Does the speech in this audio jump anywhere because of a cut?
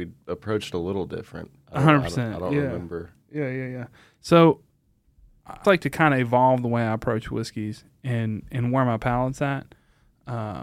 yes; 1 cut; at 5.6 s

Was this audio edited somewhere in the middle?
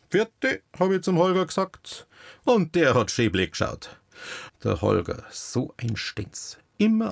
yes; 1 cut; at 4.5 s

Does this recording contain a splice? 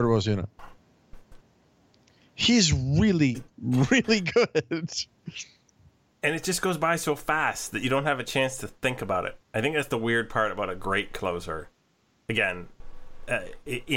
no; 0 cuts

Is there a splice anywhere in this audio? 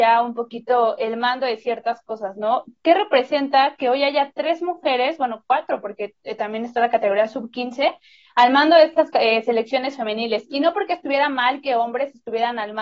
no; 0 cuts

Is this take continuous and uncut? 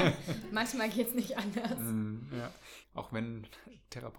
no; 1 cut; at 2.8 s

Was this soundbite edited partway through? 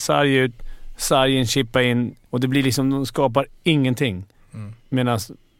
yes; 1 cut; at 2.2 s

